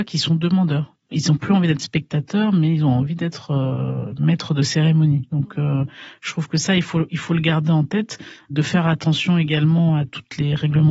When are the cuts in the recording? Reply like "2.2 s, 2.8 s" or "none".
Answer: 1.1 s